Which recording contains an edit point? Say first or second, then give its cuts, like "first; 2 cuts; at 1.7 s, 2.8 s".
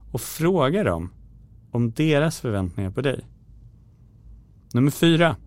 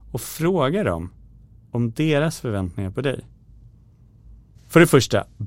second; 1 cut; at 4.6 s